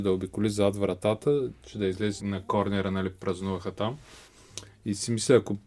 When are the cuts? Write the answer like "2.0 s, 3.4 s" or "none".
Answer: 2.2 s